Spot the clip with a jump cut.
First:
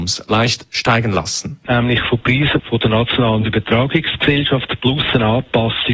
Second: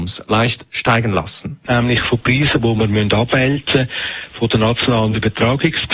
first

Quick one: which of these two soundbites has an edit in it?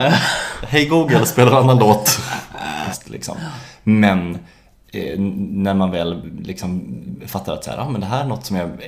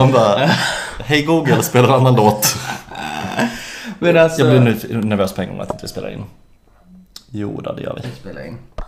first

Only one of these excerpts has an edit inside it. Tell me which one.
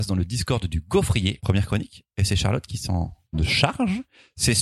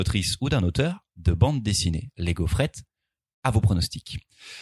first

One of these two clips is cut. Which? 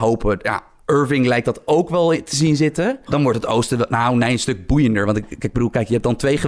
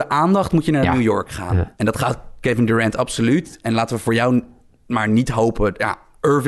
first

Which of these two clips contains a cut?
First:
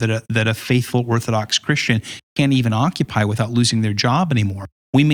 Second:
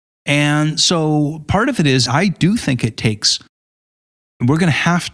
second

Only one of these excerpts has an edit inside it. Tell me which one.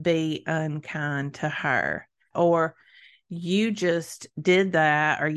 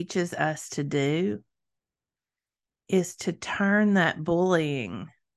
first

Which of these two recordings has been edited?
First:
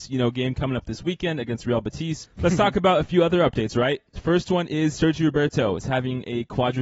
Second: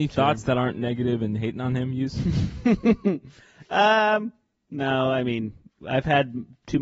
first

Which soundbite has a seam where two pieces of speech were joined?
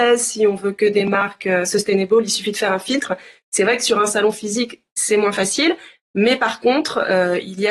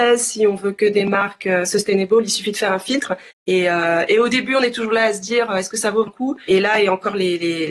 second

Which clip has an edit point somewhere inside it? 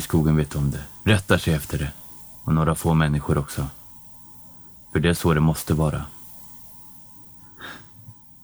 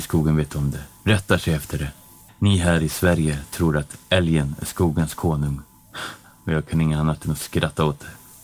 second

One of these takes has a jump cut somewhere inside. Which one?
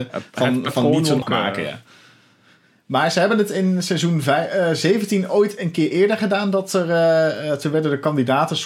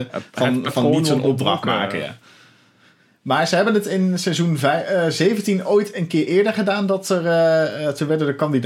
first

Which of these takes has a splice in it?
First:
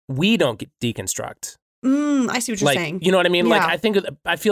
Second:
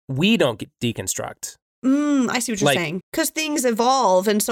second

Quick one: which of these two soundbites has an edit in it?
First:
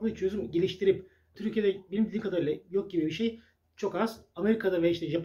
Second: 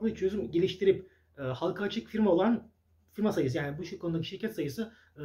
first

